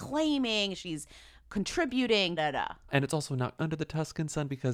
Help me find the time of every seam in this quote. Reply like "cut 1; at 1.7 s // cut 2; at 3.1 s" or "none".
cut 1; at 2.4 s // cut 2; at 3.6 s